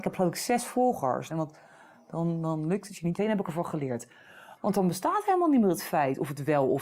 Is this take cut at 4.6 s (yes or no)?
yes